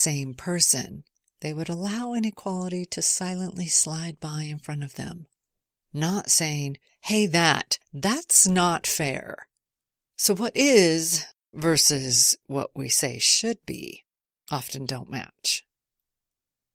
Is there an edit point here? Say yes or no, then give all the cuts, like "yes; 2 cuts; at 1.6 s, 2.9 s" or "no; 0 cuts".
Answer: no; 0 cuts